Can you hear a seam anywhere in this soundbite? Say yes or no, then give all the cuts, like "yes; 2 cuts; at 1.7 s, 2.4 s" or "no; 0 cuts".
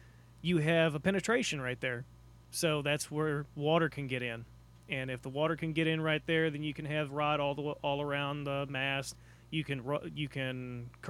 no; 0 cuts